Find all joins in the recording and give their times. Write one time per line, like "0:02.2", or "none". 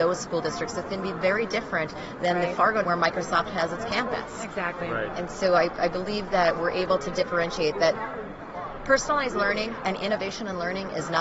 0:02.8